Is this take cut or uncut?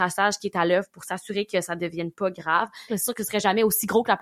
cut